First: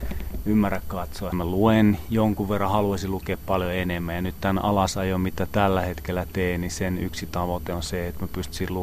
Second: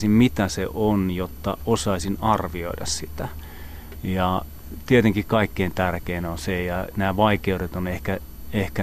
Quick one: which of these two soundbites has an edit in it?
first; 1 cut; at 1.3 s

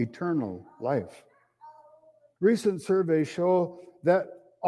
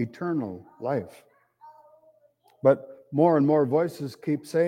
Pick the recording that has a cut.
first; 1 cut; at 2.4 s

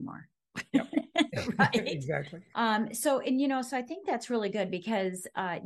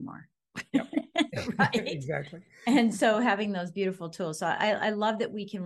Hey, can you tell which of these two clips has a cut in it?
first; 1 cut; at 2.5 s

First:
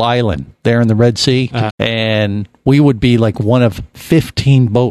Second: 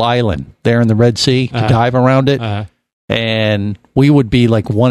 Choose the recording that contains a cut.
first; 1 cut; at 1.7 s

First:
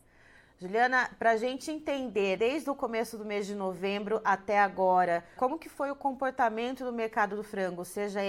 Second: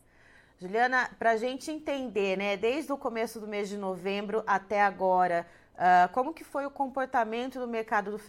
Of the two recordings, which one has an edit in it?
first; 2 cuts; at 2.4 s, 5.4 s

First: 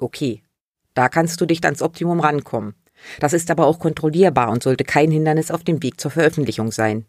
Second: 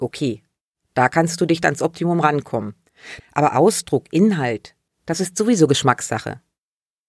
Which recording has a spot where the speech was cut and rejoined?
second; 2 cuts; at 3.2 s, 4.9 s

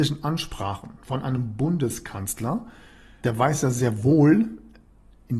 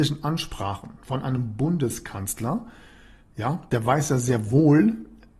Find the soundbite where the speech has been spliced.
first; 1 cut; at 3.2 s

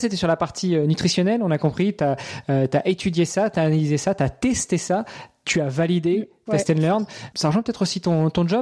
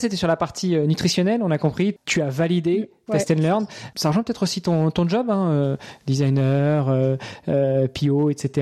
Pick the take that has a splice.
second; 1 cut; at 2.0 s

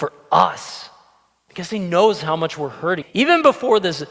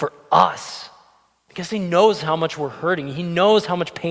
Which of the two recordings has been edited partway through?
first; 1 cut; at 3.0 s

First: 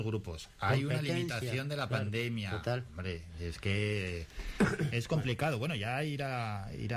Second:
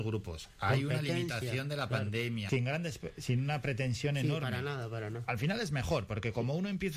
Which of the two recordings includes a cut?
second; 1 cut; at 2.5 s

